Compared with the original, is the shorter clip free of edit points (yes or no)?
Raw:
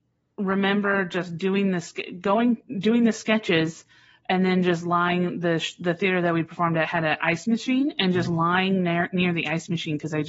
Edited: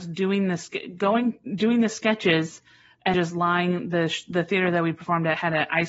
no